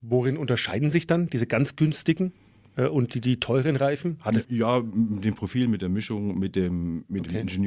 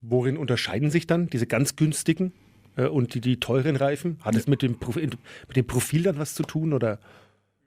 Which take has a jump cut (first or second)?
first